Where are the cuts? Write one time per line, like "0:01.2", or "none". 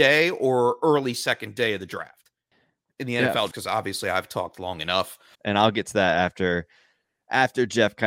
0:03.5
0:05.3